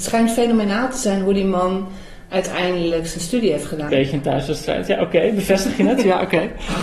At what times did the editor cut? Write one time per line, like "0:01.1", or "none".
0:03.9

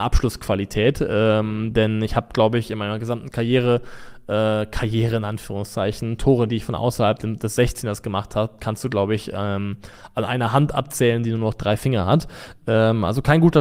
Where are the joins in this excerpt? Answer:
none

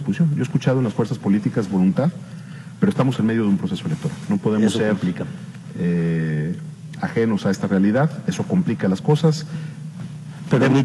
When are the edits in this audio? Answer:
none

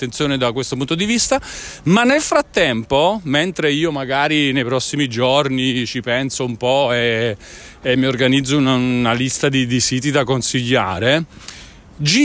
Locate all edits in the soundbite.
none

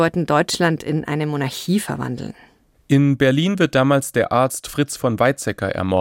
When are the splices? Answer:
none

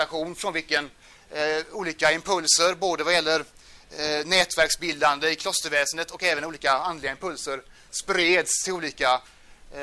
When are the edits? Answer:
none

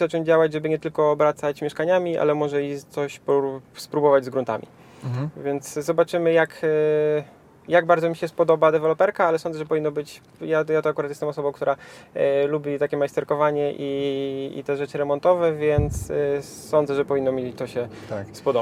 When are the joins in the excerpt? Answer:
none

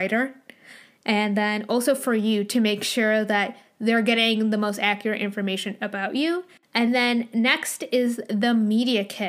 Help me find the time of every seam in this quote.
none

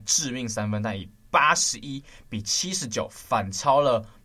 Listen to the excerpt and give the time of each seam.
none

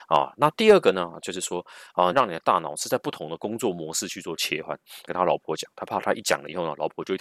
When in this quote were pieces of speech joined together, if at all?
0:02.1
0:05.1

